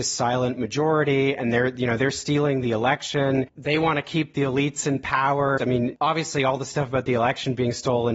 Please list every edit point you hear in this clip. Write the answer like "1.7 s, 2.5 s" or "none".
5.6 s